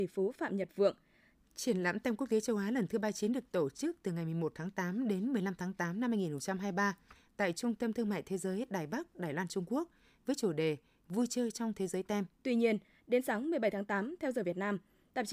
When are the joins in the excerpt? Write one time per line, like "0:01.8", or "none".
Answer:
0:01.3
0:12.4

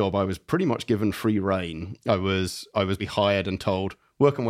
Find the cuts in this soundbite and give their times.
0:03.0

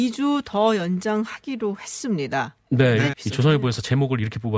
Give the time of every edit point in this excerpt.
0:03.1

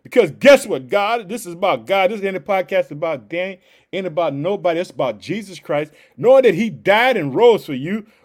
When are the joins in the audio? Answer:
none

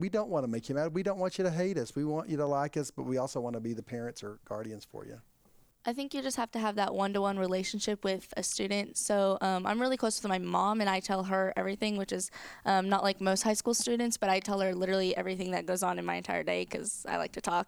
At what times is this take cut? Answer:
none

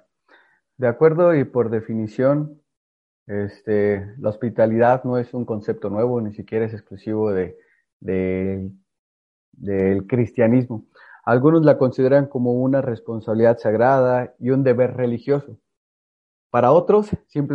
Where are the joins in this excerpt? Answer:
none

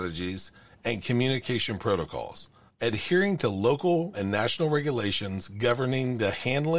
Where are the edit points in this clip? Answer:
0:02.7
0:04.1

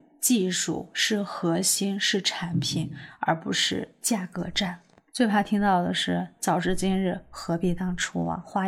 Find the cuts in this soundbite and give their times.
none

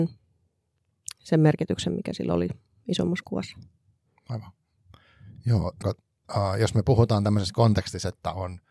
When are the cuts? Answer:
0:05.8

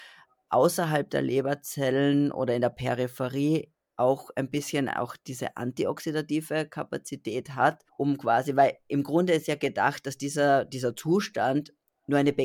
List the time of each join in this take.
0:07.9

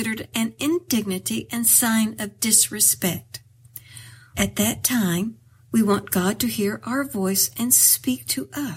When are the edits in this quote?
0:04.3

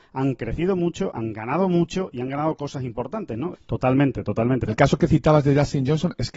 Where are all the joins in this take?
0:03.5
0:04.7

